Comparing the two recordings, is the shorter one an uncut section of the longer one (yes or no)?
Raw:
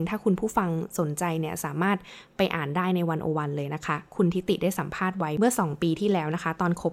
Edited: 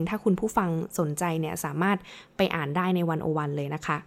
yes